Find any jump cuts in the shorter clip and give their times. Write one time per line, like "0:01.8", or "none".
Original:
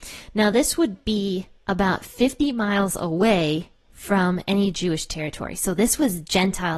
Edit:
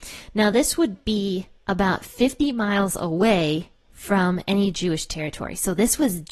none